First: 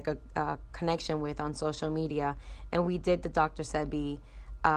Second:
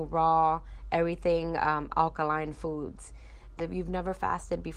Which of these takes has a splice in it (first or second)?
second